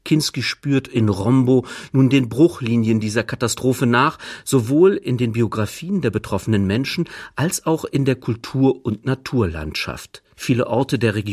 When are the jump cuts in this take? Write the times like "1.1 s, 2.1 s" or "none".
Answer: 10.3 s